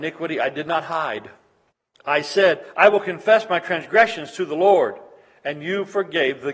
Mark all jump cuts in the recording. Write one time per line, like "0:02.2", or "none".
none